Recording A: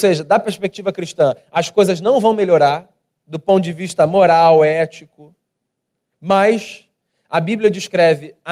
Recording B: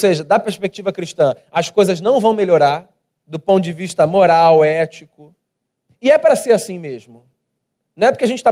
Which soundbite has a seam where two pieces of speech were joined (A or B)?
B